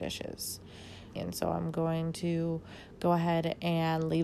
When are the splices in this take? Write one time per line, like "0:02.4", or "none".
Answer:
0:01.2